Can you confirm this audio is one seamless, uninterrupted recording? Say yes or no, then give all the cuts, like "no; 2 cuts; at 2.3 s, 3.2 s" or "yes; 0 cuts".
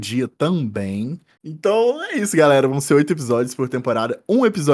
no; 1 cut; at 1.4 s